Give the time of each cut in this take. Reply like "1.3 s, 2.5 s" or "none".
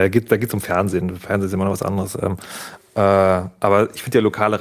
none